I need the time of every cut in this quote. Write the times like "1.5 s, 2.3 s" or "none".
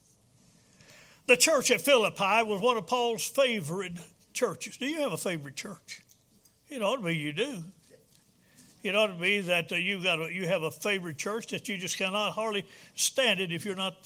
none